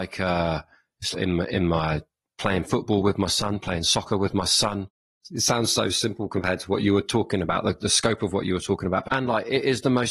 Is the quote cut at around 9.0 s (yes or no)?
yes